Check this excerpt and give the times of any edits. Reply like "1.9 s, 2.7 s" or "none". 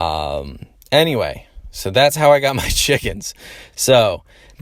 none

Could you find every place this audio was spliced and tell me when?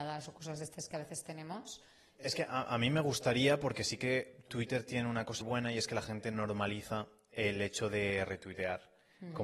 2.1 s, 5.4 s

